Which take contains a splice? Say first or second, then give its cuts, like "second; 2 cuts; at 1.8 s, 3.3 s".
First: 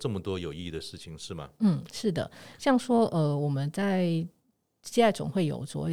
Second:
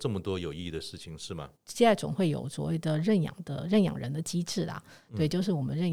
second; 1 cut; at 1.5 s